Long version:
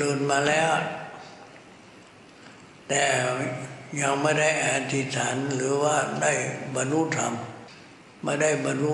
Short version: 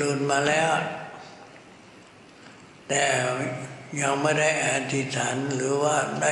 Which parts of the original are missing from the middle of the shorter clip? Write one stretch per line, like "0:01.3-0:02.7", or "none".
none